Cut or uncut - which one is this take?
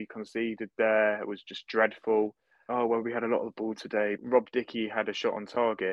cut